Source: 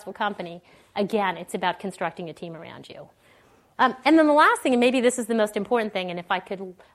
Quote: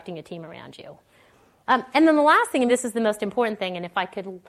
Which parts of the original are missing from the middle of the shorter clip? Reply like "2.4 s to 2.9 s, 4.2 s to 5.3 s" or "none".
4.8 s to 5.0 s